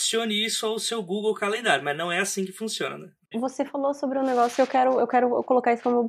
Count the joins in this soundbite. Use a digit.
1